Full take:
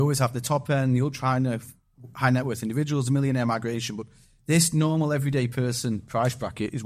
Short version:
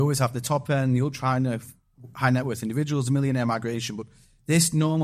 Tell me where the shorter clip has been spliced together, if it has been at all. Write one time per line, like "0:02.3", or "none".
none